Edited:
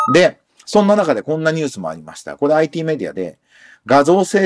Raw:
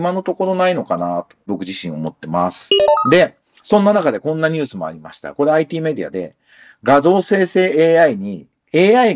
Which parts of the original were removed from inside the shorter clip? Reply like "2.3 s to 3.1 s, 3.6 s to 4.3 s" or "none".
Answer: none

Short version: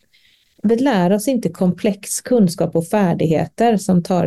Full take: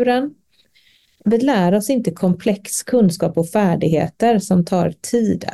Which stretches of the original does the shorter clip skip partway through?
none

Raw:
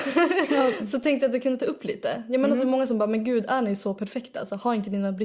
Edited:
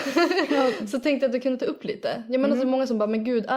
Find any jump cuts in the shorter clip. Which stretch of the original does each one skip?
none

